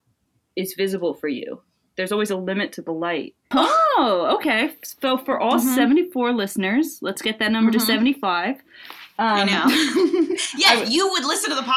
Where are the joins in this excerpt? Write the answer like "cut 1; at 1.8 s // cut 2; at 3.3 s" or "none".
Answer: cut 1; at 3.5 s